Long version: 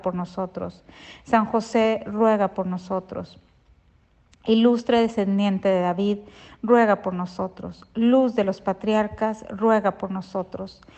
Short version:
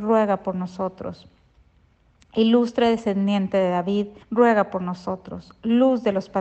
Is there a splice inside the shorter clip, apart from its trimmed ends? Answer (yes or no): yes